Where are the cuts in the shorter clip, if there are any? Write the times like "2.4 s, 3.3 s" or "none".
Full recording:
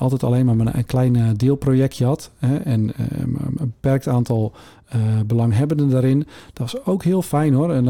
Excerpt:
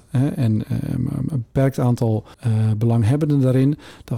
2.3 s